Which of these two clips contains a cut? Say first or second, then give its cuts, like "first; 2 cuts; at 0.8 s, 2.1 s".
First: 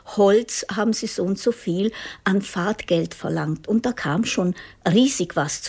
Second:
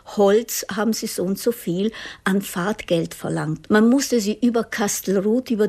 second; 1 cut; at 3.7 s